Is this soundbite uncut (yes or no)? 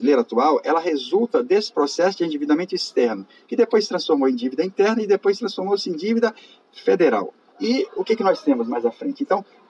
no